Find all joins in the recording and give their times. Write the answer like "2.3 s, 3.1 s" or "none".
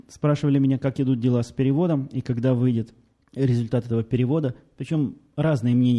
none